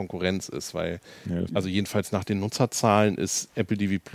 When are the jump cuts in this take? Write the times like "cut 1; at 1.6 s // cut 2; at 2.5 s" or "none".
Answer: cut 1; at 1.5 s